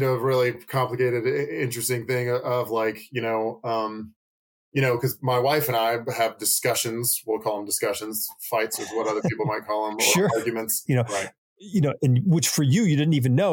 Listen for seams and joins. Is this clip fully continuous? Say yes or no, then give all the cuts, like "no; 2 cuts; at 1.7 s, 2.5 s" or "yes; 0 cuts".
no; 1 cut; at 10.9 s